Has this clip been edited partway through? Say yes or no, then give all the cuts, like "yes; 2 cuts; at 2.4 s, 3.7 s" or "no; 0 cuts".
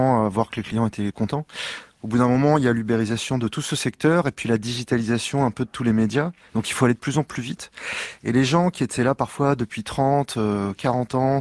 no; 0 cuts